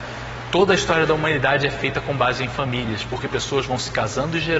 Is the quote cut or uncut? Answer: uncut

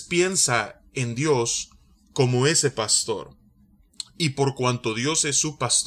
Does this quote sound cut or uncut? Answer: uncut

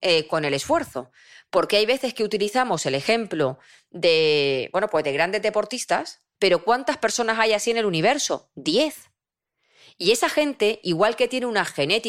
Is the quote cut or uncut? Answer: cut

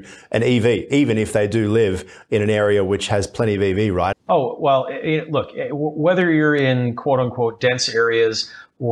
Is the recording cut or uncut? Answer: cut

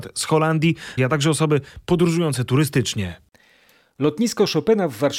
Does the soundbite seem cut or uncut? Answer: cut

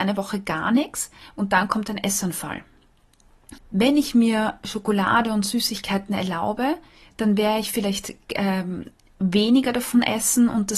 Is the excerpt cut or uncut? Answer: cut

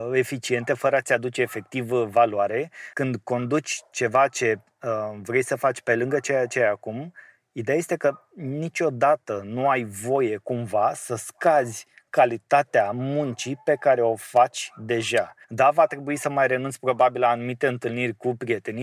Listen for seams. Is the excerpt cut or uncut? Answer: cut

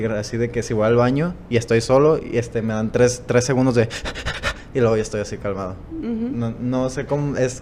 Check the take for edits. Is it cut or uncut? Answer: uncut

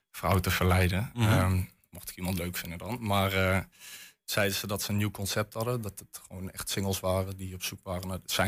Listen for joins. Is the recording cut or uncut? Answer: uncut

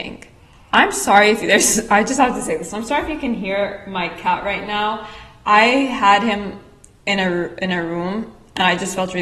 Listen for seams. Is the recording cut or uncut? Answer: uncut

